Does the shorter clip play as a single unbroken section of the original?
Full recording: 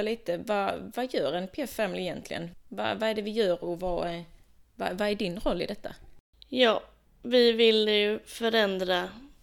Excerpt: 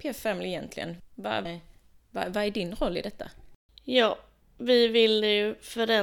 no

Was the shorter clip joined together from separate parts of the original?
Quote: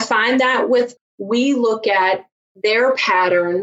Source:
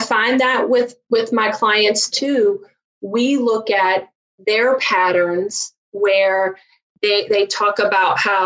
yes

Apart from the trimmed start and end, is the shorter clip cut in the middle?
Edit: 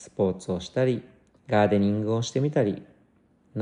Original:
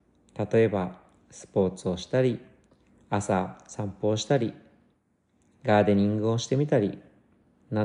yes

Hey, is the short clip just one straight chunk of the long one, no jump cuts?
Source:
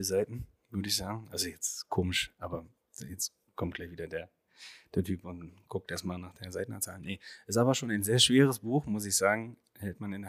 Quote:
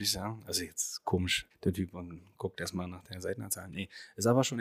no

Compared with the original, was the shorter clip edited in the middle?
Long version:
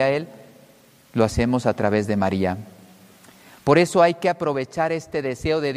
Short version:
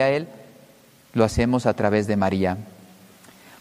no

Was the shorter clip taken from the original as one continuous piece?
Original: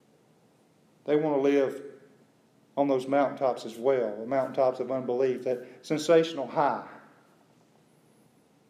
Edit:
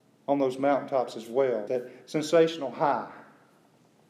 no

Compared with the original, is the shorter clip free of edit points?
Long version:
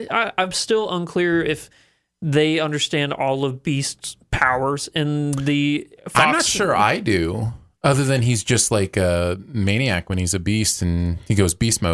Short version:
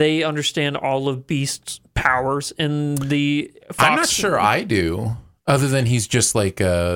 yes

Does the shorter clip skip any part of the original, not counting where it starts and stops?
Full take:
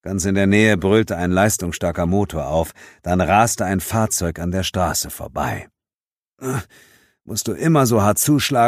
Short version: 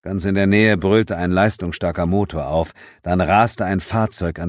no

